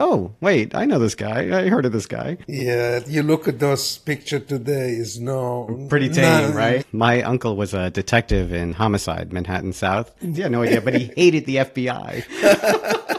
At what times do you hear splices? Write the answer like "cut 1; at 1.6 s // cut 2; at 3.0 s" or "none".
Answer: cut 1; at 6.8 s // cut 2; at 10.3 s